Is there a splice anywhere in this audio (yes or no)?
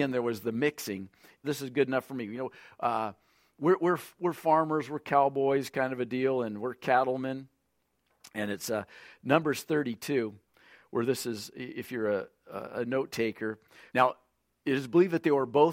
yes